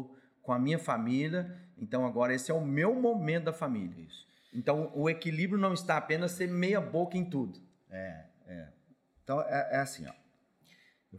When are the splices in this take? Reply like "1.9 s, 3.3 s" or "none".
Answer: none